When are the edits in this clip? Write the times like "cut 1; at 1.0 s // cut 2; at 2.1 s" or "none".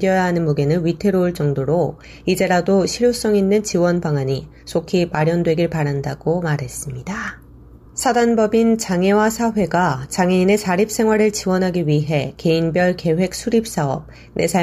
none